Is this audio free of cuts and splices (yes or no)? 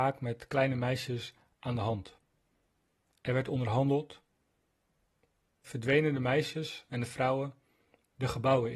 no